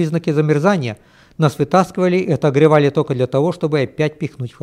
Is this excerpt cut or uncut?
uncut